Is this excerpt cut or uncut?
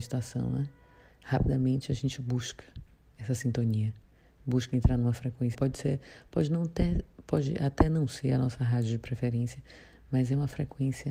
cut